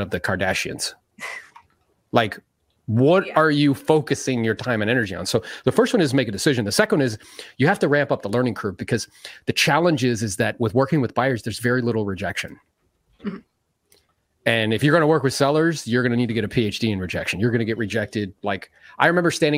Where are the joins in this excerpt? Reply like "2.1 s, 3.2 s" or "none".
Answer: none